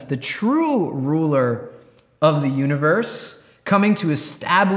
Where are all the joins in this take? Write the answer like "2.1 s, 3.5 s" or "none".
none

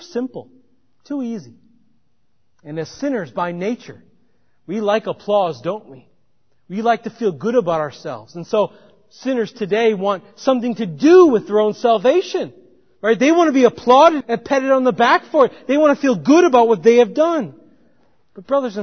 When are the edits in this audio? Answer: 14.2 s

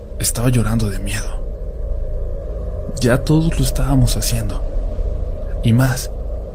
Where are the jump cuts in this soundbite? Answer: none

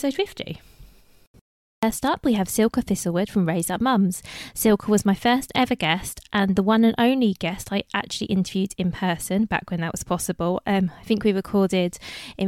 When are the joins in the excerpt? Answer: 4.5 s

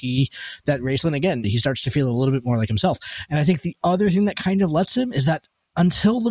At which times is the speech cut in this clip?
1.4 s

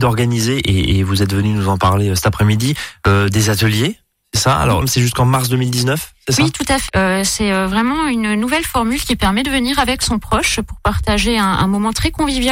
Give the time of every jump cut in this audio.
4.8 s, 6.9 s

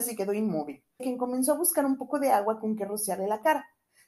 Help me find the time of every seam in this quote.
1.0 s

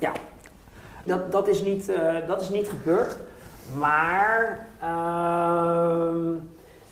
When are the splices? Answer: 1.1 s

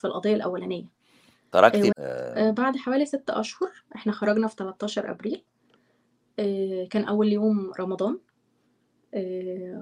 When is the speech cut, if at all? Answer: 1.9 s

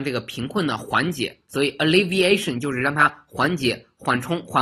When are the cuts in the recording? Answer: none

